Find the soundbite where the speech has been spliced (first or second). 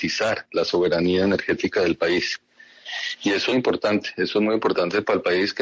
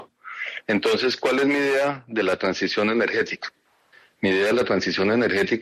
first